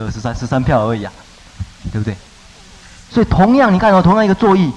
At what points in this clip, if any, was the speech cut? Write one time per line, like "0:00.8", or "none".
0:01.8